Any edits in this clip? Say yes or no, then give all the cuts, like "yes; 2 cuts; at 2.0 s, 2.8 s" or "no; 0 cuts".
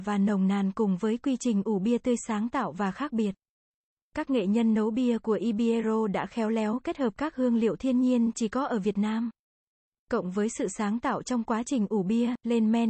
no; 0 cuts